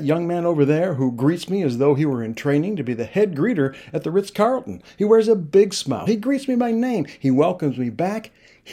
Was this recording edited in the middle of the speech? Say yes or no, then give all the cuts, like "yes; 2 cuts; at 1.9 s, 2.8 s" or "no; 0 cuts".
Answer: no; 0 cuts